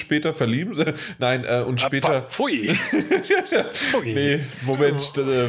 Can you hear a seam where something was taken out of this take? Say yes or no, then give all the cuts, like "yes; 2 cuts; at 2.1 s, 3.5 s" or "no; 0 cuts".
no; 0 cuts